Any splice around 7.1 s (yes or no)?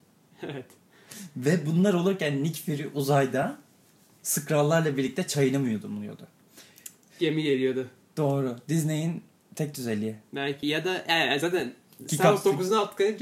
yes